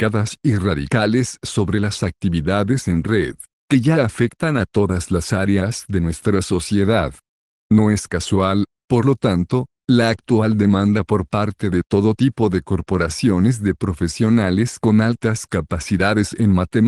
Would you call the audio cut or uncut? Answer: uncut